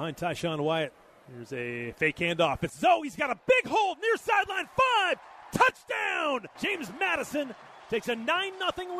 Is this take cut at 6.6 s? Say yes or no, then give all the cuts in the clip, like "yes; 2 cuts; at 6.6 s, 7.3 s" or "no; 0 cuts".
yes; 1 cut; at 6.6 s